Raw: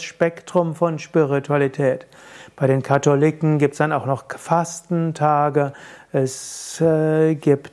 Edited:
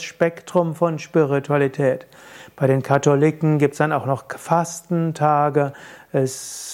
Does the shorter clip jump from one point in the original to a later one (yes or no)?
no